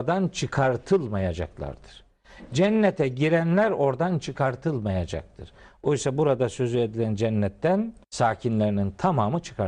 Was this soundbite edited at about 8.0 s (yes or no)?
yes